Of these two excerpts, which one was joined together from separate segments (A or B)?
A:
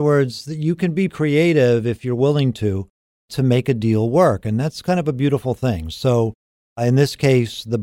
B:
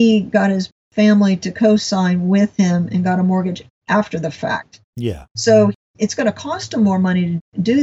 A